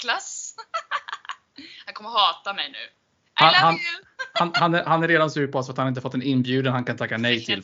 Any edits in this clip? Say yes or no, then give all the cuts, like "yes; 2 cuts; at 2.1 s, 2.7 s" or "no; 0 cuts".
no; 0 cuts